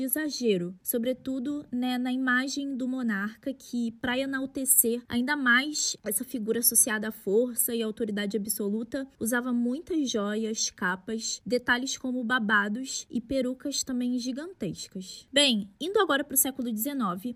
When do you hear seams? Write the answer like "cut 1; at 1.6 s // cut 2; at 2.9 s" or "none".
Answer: cut 1; at 6.0 s